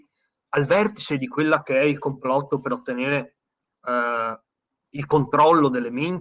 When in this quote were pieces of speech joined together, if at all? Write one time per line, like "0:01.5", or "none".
0:04.8